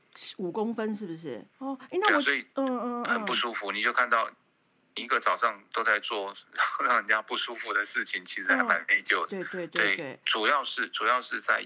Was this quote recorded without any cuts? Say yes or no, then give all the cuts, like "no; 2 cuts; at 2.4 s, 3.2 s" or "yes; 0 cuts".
no; 2 cuts; at 1.5 s, 9.3 s